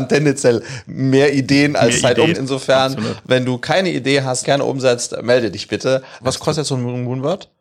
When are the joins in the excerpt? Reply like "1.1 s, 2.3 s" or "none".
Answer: 2.3 s, 4.4 s, 6.2 s